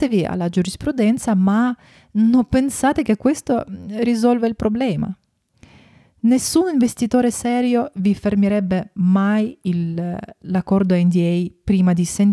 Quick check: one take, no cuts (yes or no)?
yes